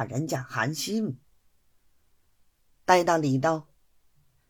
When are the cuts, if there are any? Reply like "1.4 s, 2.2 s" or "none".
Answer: none